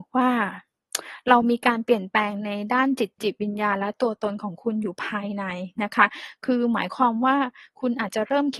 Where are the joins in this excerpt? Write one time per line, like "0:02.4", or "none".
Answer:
0:03.2

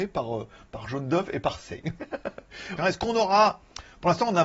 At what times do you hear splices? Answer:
0:02.8

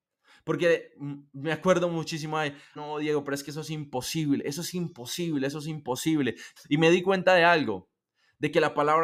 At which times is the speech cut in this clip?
0:02.8
0:06.6

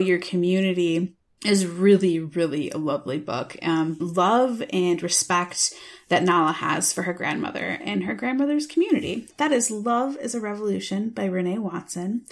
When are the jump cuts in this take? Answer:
0:04.0
0:09.3

